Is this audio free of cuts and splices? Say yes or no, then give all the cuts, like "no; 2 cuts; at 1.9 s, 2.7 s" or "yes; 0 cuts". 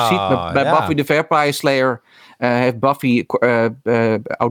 yes; 0 cuts